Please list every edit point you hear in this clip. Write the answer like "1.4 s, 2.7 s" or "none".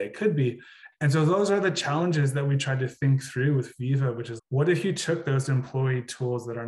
0.9 s, 4.4 s